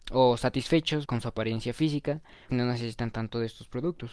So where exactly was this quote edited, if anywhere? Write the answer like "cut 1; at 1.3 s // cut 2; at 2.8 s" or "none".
cut 1; at 1.0 s // cut 2; at 2.5 s